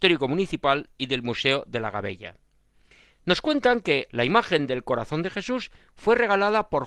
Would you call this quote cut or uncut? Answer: cut